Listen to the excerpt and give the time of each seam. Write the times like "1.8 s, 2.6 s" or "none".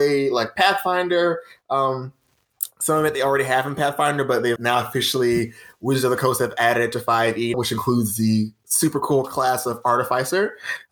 4.6 s, 7.5 s

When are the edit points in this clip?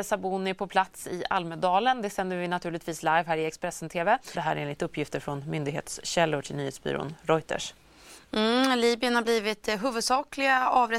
4.3 s

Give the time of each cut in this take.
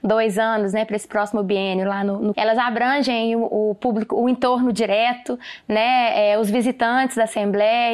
2.3 s

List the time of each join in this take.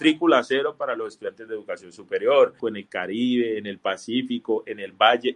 2.6 s

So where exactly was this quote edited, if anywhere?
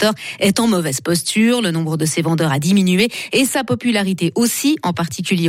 none

